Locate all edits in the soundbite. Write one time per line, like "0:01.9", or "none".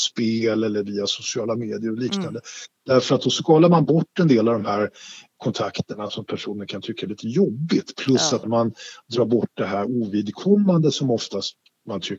0:08.4